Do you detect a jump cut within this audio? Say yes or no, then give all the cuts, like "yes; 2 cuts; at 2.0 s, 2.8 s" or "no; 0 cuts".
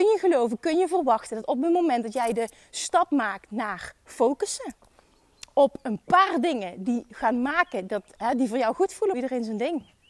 yes; 1 cut; at 9.1 s